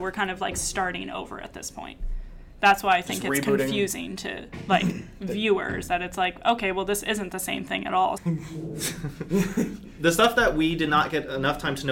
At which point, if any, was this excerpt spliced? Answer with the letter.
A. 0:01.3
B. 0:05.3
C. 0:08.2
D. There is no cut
C